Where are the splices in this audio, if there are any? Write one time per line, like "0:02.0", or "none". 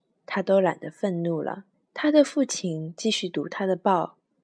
0:01.7